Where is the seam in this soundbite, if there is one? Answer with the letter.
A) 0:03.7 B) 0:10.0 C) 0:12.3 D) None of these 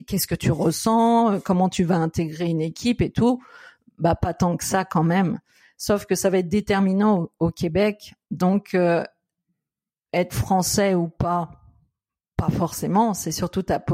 D